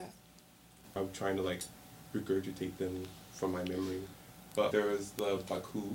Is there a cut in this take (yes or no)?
yes